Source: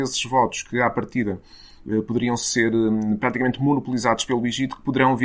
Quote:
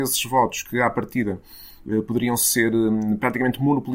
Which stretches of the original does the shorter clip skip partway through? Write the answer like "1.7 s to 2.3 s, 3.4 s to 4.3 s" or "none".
none